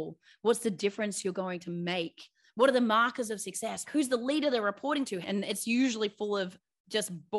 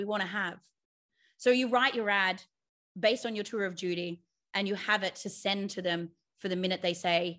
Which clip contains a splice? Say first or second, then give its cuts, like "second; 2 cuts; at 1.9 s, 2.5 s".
first; 2 cuts; at 3.9 s, 5.2 s